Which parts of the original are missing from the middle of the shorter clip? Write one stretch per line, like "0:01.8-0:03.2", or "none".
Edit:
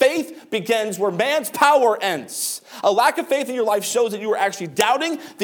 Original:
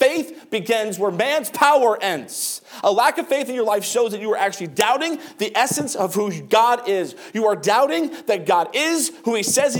none